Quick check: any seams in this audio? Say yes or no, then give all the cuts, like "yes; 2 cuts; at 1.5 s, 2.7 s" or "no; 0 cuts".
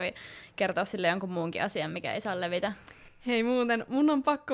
no; 0 cuts